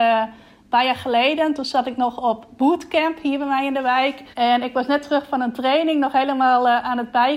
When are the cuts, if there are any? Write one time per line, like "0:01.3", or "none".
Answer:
0:04.3